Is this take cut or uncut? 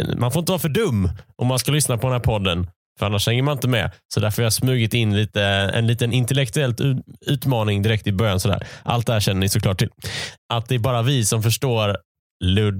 cut